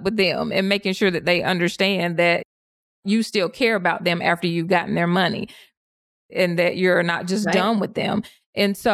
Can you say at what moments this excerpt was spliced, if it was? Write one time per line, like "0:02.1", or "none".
none